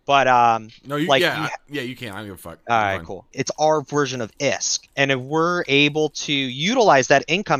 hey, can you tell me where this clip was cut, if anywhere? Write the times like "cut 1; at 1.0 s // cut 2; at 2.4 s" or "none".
cut 1; at 3.3 s // cut 2; at 4.9 s